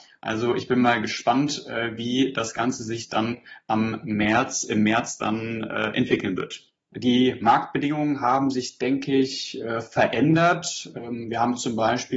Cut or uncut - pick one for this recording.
cut